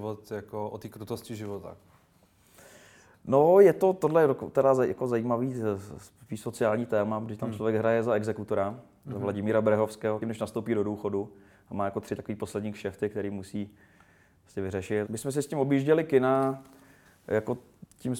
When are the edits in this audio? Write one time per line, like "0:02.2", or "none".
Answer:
0:10.2
0:15.1